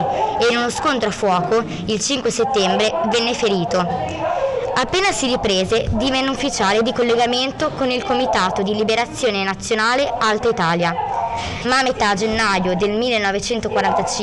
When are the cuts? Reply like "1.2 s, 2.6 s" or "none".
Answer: none